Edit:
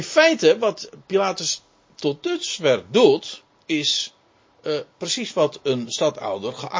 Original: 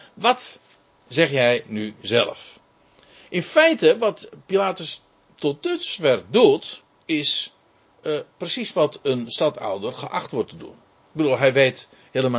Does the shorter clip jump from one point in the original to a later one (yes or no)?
no